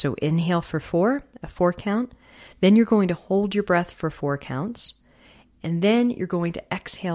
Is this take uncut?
yes; 0 cuts

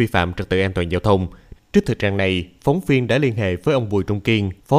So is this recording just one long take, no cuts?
no; 1 cut; at 1.6 s

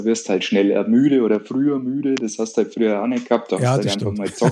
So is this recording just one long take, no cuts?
yes; 0 cuts

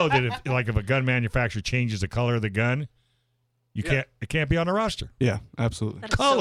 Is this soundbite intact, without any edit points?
yes; 0 cuts

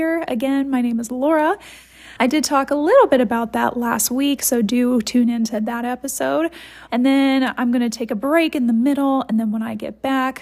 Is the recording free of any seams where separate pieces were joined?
no; 2 cuts; at 2.2 s, 6.9 s

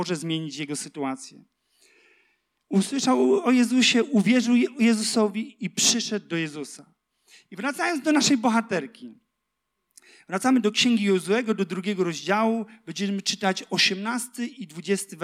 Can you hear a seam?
no; 0 cuts

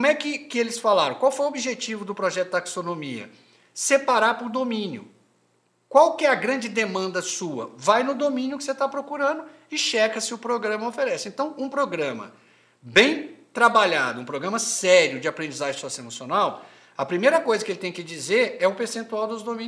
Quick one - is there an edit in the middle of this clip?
no; 0 cuts

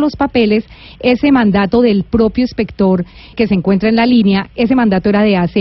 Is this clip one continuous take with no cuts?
no; 1 cut; at 3.3 s

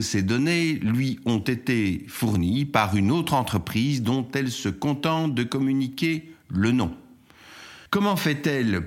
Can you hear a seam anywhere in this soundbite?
yes; 1 cut; at 7.9 s

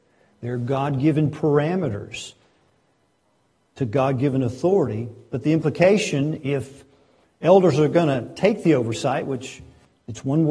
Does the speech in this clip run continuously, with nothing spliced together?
yes; 0 cuts

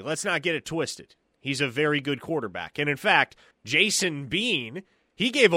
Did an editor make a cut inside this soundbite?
yes; 1 cut; at 3.5 s

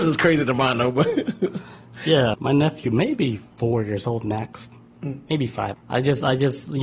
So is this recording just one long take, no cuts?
no; 2 cuts; at 2.3 s, 5.7 s

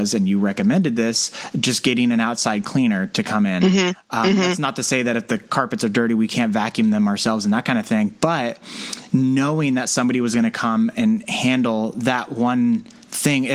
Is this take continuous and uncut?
yes; 0 cuts

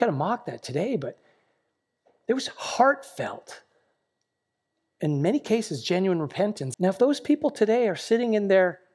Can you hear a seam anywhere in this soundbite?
yes; 1 cut; at 6.7 s

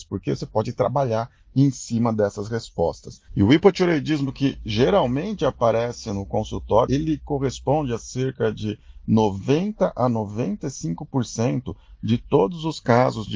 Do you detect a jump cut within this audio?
yes; 2 cuts; at 3.3 s, 6.9 s

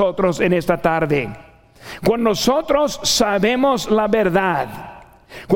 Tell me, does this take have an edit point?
no; 0 cuts

